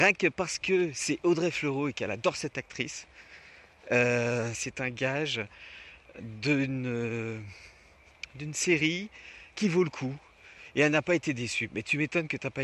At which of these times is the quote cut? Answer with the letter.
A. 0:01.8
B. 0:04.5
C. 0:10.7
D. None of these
B